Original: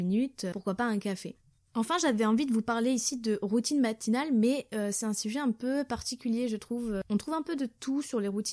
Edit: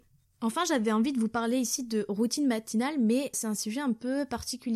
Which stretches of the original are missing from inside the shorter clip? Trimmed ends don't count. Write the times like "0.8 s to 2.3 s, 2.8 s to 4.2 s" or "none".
4.7 s to 4.9 s